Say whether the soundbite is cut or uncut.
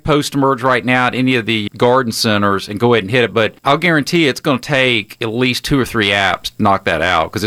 cut